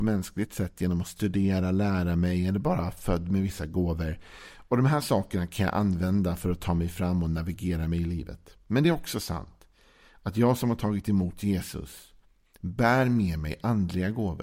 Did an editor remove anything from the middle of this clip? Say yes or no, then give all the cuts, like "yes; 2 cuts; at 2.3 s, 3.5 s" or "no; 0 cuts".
no; 0 cuts